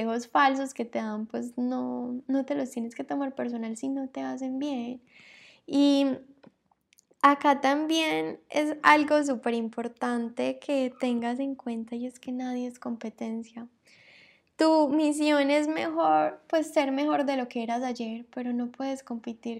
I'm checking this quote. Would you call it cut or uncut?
uncut